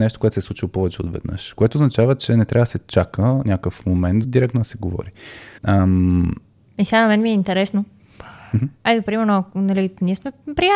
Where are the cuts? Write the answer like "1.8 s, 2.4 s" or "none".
4.2 s, 5.6 s